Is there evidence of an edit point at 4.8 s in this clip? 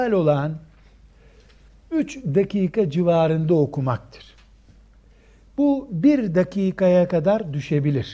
no; 0 cuts

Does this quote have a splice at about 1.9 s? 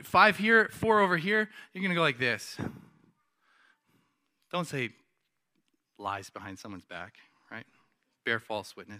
no; 0 cuts

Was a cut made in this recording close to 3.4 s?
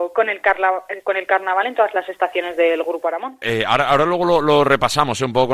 yes; 1 cut; at 3.4 s

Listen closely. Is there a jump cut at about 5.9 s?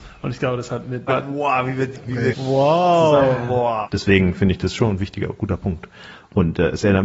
no; 3 cuts; at 1.1 s, 2.3 s, 3.9 s

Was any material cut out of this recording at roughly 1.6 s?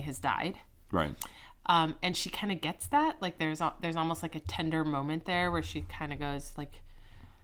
no; 0 cuts

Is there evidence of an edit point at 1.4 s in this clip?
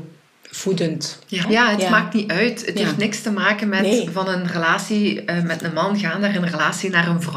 yes; 1 cut; at 1.4 s

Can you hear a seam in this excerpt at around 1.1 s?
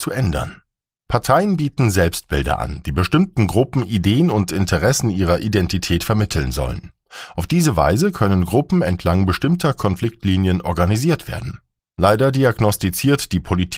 yes; 2 cuts; at 1.1 s, 11.8 s

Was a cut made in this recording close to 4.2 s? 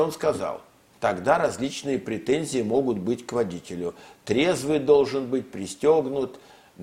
no; 1 cut; at 1.0 s

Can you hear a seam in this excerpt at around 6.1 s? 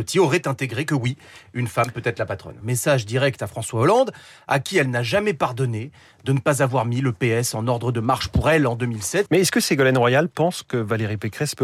no; 2 cuts; at 2.6 s, 9.3 s

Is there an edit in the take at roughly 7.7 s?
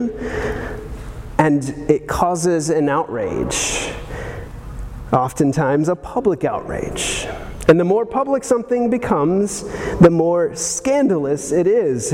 no; 0 cuts

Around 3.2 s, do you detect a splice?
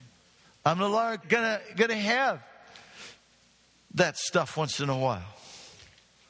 no; 1 cut; at 1.2 s

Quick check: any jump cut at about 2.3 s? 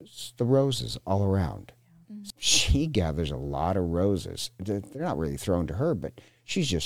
yes; 1 cut; at 2.3 s

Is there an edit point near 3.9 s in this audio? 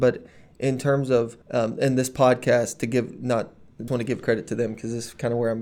yes; 2 cuts; at 1.4 s, 3.9 s

